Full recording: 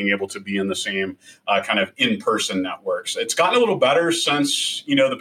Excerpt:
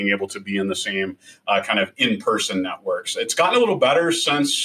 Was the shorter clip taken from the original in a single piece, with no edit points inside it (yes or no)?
yes